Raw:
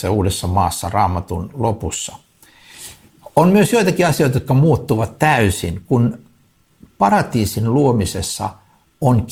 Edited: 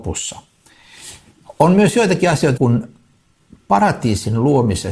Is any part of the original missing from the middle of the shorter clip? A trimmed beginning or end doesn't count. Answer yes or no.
yes